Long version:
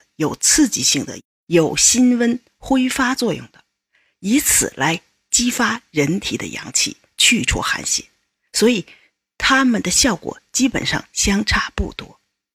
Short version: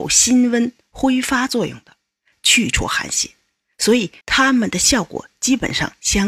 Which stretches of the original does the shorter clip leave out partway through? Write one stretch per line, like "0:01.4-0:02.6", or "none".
0:04.0-0:07.1
0:08.9-0:09.3